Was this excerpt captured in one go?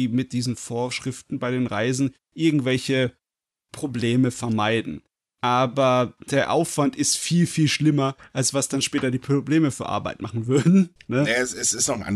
yes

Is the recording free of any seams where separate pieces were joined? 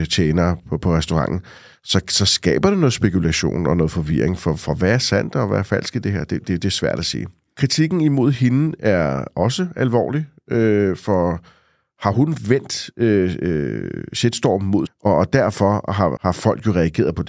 no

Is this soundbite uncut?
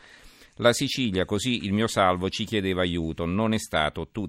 no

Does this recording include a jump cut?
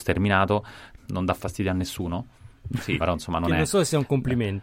yes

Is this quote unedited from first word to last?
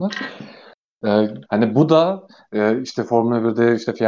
no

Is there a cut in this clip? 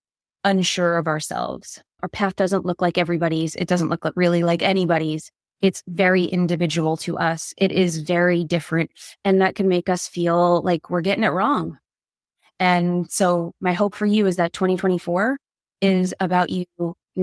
no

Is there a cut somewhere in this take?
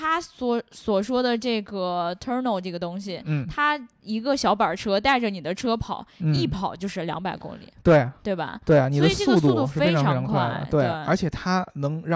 no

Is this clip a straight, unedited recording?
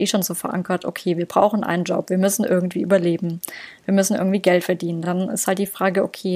yes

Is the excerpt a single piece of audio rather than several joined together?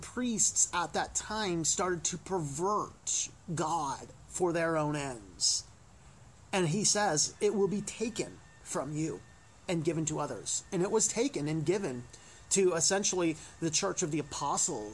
yes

